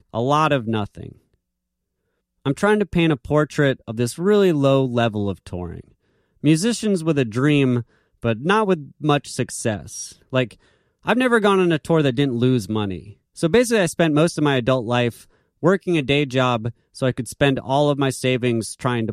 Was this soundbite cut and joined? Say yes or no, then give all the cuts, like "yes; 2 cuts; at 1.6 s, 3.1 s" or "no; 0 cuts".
no; 0 cuts